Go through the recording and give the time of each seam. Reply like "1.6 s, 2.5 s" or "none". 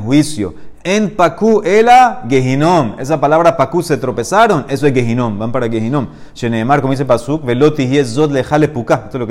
none